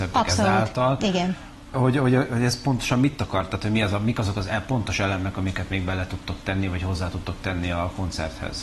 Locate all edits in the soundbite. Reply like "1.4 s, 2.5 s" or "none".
1.7 s